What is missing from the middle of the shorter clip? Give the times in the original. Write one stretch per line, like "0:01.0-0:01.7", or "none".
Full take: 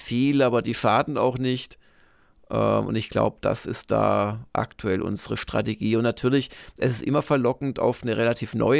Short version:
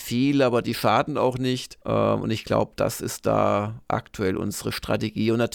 0:01.8-0:02.5